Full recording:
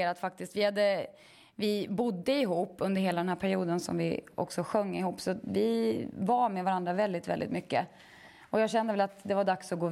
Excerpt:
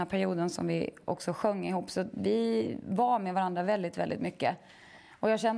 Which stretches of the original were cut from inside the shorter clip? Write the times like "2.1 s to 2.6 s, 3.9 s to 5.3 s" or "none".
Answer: none